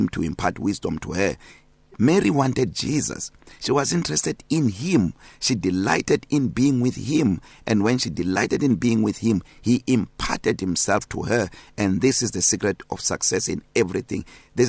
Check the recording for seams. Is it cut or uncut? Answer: uncut